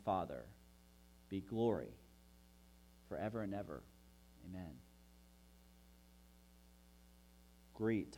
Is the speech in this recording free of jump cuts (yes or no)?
yes